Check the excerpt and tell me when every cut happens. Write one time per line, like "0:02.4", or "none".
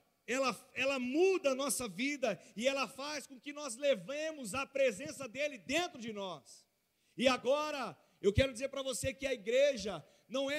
none